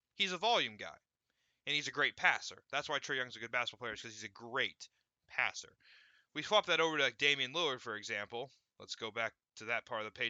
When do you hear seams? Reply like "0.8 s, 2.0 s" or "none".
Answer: none